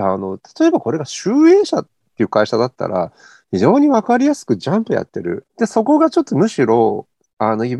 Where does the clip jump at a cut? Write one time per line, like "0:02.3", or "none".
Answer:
0:05.4